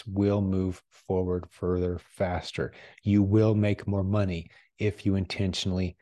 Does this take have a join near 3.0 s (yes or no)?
no